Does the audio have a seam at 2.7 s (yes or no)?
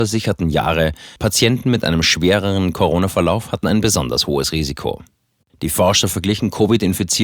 no